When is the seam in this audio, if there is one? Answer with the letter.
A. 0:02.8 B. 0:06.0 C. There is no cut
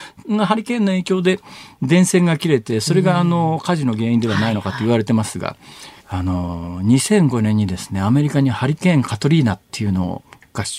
B